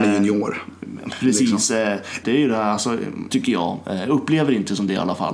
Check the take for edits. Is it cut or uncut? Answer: cut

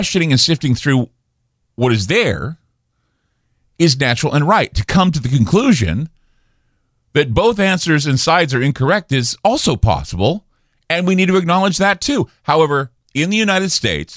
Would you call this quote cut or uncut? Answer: uncut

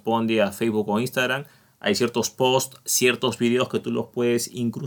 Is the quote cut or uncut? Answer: uncut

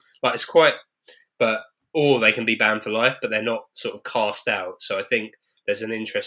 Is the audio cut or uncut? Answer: uncut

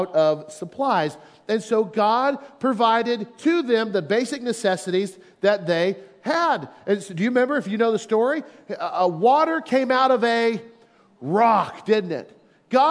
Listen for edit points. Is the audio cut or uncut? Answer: uncut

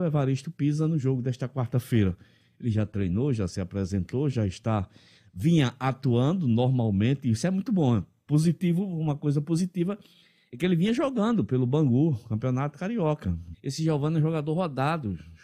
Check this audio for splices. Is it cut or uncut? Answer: cut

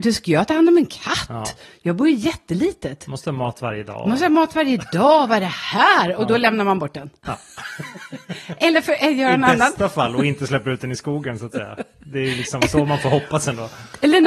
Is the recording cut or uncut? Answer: uncut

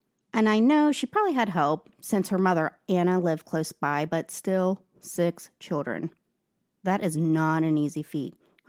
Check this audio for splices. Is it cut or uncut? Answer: uncut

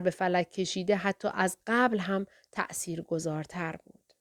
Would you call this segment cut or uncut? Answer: uncut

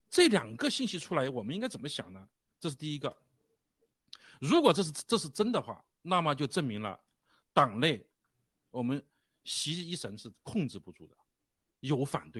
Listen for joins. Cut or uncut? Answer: cut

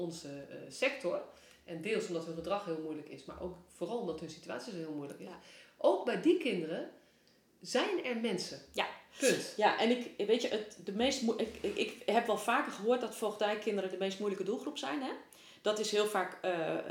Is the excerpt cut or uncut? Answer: uncut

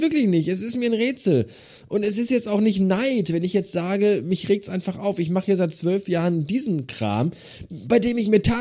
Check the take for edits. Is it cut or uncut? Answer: uncut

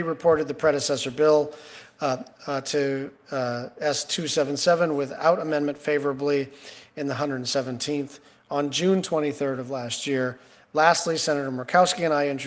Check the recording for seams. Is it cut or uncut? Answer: uncut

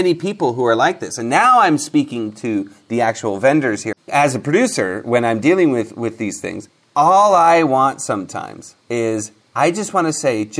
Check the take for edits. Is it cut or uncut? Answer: cut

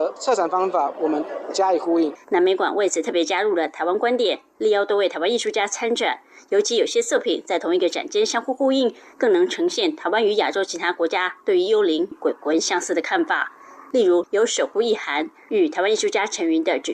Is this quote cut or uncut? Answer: cut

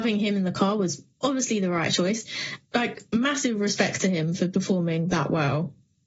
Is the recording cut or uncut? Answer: cut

